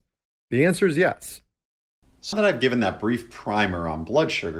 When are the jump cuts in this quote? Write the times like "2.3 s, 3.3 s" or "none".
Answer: 2.3 s